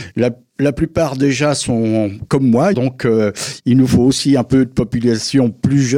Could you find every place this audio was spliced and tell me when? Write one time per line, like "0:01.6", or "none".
0:02.7

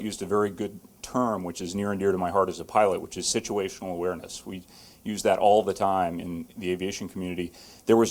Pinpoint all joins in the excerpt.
none

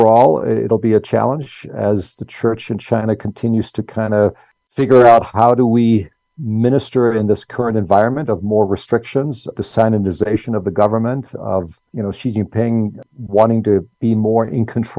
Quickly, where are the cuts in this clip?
0:09.5

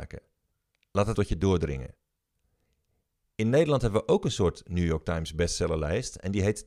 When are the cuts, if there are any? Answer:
0:01.1

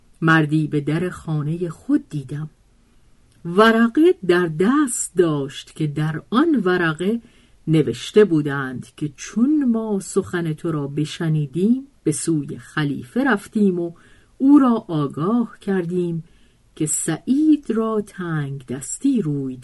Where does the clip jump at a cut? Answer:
0:12.0

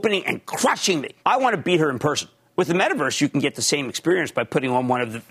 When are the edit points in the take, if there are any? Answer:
0:01.2

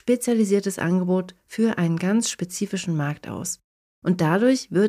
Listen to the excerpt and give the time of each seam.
0:03.9

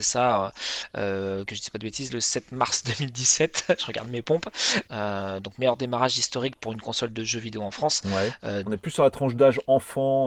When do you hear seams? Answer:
0:04.9
0:08.7

